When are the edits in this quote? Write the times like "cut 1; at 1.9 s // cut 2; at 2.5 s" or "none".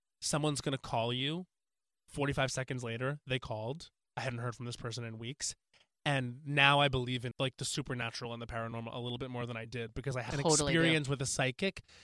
cut 1; at 7.3 s // cut 2; at 10.3 s